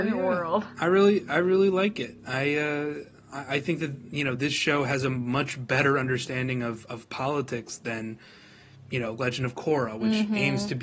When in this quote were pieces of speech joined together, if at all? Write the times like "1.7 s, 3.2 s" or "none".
none